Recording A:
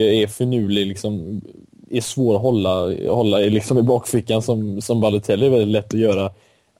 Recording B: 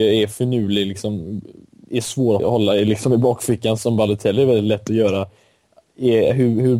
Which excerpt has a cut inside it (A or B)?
B